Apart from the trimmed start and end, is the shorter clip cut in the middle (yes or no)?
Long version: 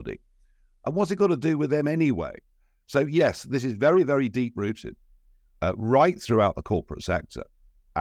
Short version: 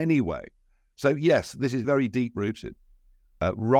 yes